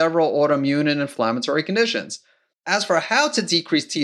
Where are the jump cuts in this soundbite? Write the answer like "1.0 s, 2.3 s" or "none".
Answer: 2.5 s